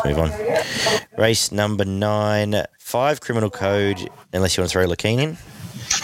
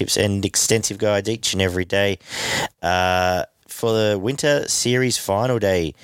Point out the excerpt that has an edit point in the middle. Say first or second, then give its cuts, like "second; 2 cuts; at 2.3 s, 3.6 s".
first; 2 cuts; at 2.7 s, 4.2 s